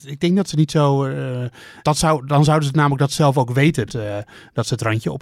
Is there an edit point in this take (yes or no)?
yes